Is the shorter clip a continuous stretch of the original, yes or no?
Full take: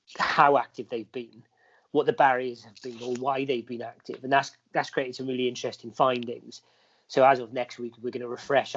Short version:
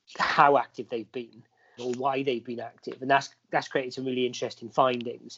no